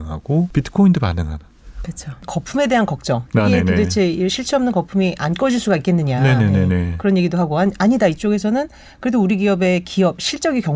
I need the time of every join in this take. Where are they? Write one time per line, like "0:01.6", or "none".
0:01.8